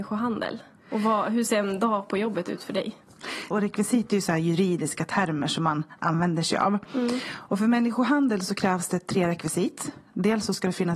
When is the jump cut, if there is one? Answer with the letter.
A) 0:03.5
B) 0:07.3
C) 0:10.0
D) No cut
A